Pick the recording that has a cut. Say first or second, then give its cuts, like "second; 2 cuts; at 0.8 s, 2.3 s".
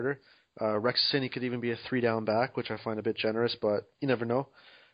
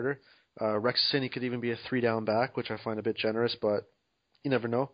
first; 1 cut; at 3.9 s